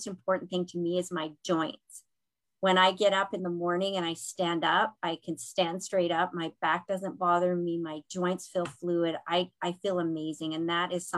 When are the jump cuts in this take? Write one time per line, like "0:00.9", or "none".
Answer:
none